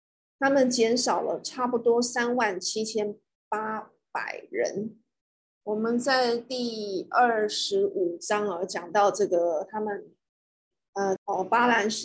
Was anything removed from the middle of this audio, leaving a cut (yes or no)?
yes